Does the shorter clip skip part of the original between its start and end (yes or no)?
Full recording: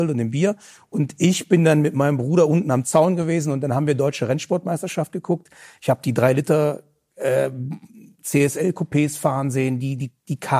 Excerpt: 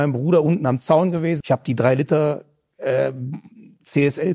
yes